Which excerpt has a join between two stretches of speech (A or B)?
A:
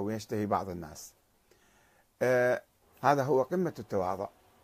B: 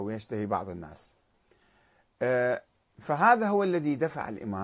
A